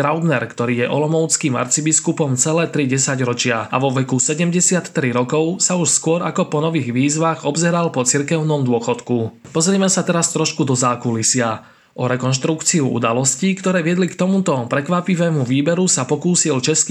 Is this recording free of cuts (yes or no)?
yes